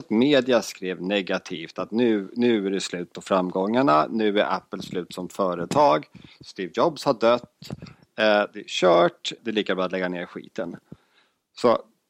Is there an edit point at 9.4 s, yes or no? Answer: yes